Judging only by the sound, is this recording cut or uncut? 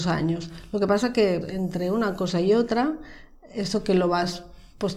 cut